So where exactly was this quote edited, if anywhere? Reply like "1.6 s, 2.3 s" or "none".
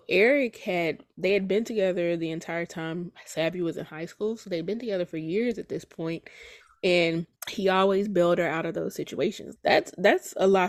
7.4 s, 9.6 s